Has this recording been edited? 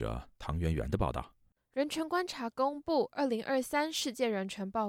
no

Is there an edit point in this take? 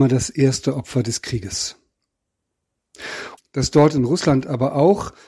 yes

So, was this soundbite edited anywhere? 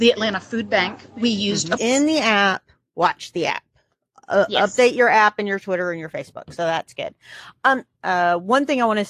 yes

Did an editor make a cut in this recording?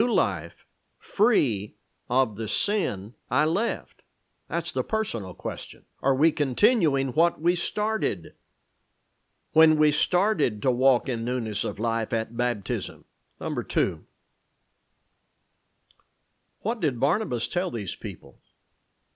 yes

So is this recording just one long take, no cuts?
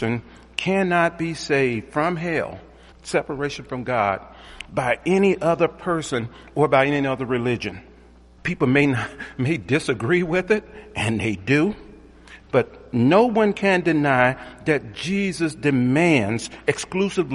no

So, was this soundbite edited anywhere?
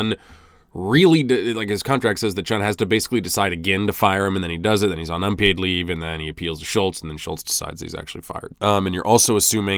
yes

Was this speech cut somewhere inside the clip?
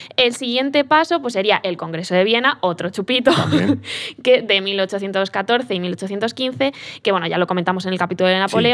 no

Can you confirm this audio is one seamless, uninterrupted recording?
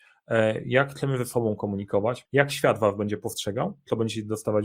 no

